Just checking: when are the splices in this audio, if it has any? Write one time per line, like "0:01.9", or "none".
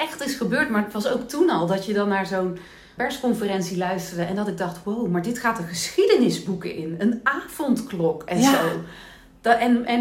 0:03.0